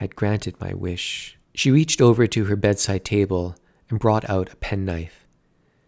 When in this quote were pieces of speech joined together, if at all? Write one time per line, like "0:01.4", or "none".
0:01.4

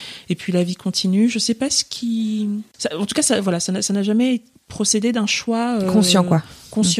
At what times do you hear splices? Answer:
none

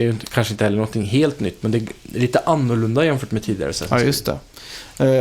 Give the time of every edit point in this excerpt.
none

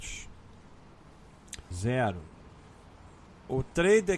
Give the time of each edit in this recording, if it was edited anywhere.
0:01.7

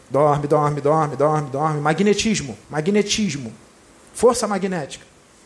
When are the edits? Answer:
0:02.6

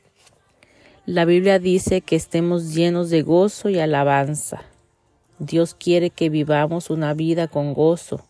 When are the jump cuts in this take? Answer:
none

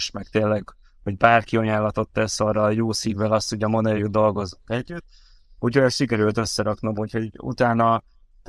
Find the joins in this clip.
0:04.0

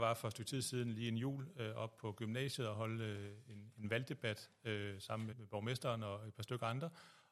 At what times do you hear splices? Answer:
0:05.3

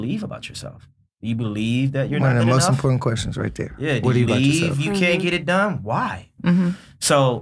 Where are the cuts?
0:04.3
0:06.4

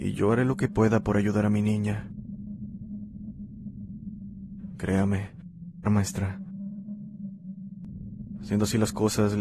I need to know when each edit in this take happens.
0:04.7
0:05.8

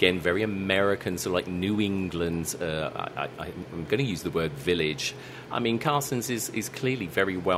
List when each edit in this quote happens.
0:05.5

